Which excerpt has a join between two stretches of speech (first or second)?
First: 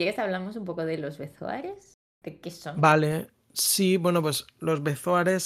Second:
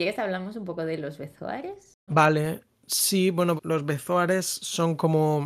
second